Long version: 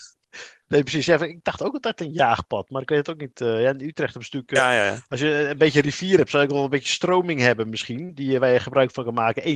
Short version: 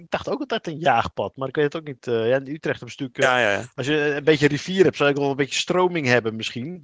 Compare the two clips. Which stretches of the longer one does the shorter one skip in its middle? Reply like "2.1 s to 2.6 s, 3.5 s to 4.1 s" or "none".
none